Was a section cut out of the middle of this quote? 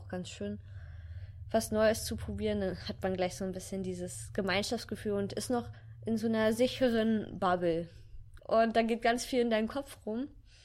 yes; 1 cut; at 8.4 s

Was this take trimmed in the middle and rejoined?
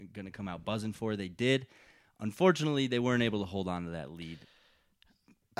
no; 0 cuts

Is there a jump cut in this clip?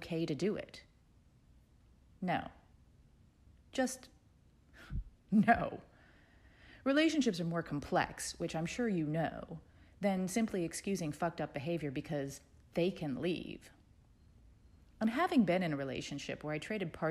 no; 0 cuts

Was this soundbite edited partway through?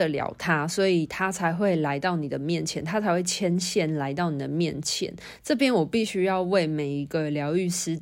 no; 0 cuts

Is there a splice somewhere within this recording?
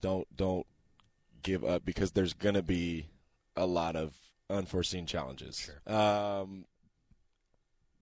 yes; 1 cut; at 5.8 s

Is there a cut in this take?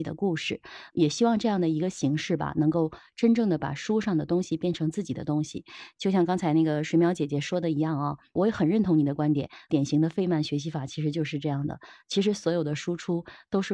no; 0 cuts

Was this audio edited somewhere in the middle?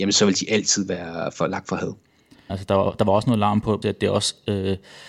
yes; 2 cuts; at 2.5 s, 3.8 s

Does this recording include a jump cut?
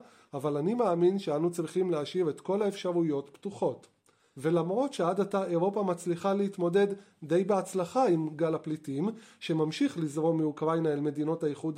no; 0 cuts

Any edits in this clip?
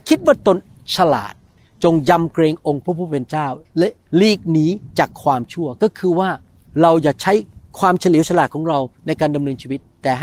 no; 0 cuts

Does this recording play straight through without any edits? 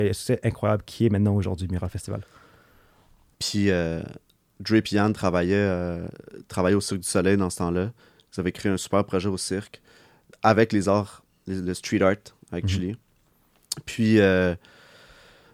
no; 1 cut; at 3.3 s

